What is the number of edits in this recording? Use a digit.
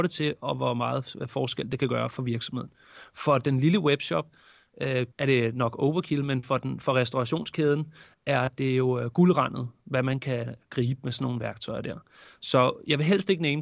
1